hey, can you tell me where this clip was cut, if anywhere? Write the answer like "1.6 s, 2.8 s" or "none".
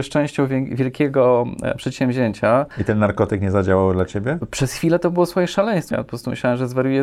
5.9 s

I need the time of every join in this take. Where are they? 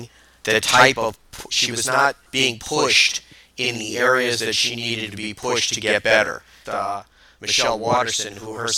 2.3 s, 6.6 s

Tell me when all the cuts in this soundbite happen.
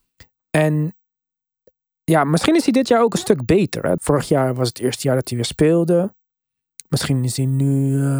4.0 s

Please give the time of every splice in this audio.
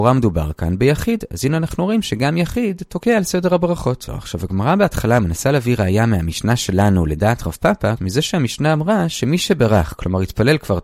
4.1 s, 8.0 s

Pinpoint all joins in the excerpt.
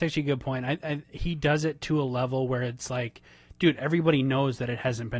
none

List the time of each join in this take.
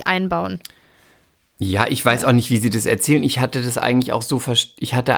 none

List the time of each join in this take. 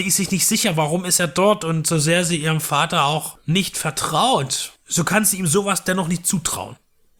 none

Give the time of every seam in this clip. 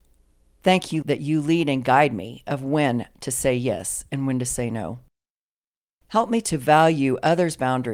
1.0 s

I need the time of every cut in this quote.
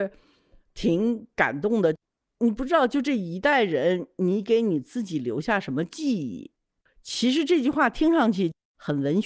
6.9 s

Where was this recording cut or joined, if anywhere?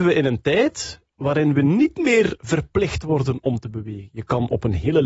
none

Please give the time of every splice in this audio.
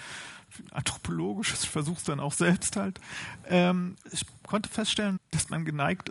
4.0 s, 5.2 s

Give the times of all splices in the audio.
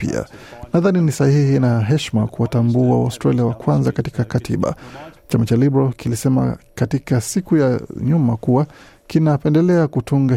5.2 s

